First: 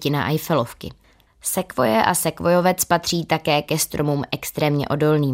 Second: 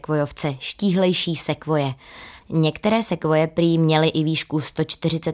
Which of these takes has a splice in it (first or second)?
second